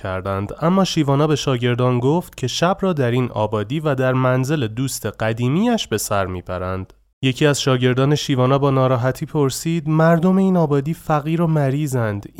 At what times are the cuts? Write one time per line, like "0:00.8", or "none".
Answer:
0:07.0